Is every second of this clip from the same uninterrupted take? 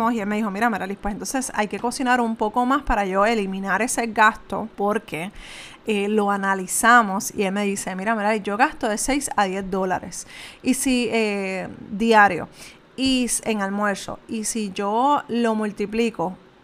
no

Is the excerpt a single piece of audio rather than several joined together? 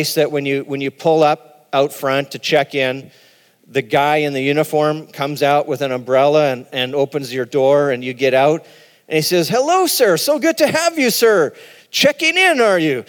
yes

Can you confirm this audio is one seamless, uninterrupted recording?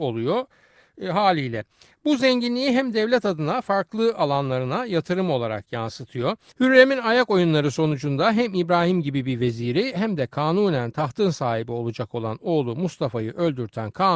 no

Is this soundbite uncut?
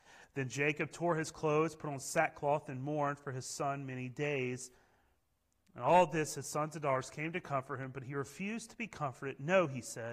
yes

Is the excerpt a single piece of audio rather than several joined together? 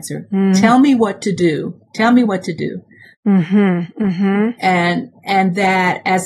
yes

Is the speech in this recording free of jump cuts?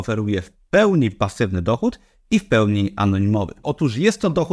no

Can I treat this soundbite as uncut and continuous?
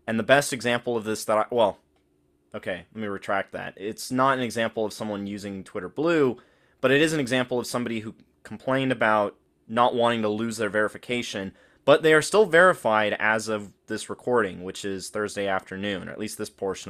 yes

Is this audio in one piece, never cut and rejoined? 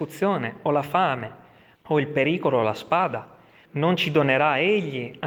no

